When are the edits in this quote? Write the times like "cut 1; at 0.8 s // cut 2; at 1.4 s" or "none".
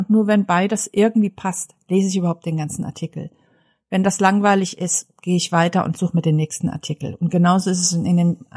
none